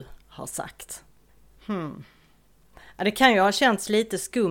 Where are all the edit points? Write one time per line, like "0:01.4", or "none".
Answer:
none